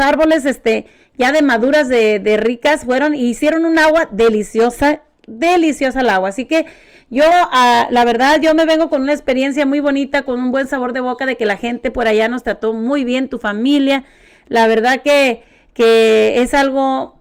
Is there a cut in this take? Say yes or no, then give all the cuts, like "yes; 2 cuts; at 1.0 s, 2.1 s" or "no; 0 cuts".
no; 0 cuts